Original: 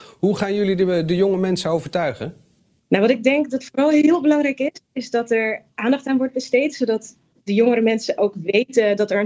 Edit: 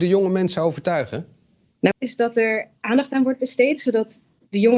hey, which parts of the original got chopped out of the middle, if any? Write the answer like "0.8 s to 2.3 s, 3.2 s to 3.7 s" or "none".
3.0 s to 4.9 s